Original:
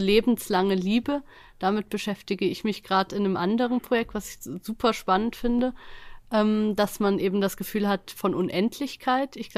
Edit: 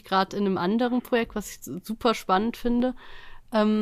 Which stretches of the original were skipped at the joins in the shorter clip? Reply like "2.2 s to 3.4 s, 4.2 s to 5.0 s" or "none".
none